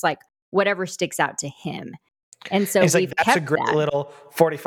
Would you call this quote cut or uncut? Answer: uncut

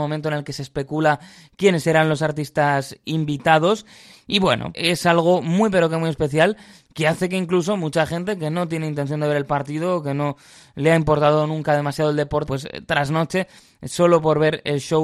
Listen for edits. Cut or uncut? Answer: cut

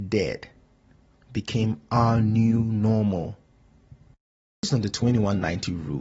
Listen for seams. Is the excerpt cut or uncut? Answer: uncut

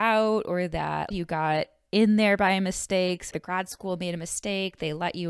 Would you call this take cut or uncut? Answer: cut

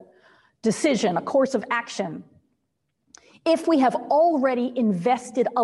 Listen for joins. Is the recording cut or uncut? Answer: uncut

